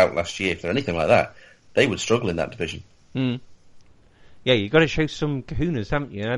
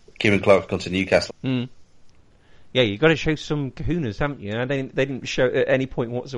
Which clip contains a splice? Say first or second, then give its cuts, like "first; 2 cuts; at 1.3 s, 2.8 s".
second; 1 cut; at 1.3 s